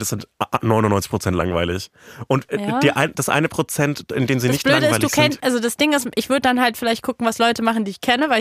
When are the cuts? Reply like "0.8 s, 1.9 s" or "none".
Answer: none